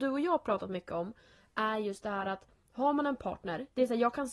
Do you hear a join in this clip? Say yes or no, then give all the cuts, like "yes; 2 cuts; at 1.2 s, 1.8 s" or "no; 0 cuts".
no; 0 cuts